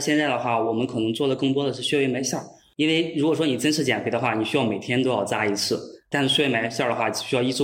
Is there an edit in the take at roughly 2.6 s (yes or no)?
no